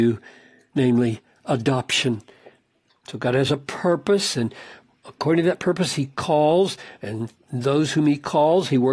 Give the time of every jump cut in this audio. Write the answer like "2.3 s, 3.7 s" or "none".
2.9 s